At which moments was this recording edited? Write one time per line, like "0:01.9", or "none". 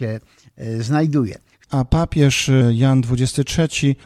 0:01.7